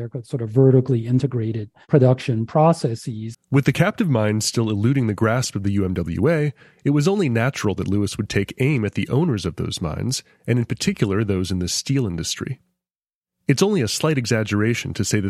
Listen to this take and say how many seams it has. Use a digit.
1